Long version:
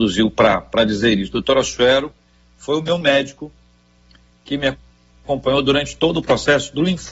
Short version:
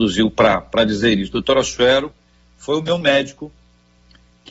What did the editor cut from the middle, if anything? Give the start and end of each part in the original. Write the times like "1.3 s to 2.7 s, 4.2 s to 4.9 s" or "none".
none